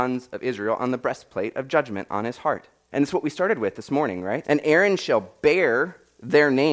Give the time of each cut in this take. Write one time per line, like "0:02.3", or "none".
0:02.9
0:04.4

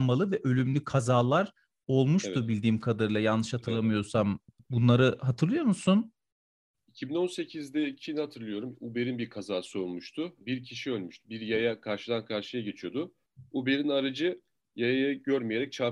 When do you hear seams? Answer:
none

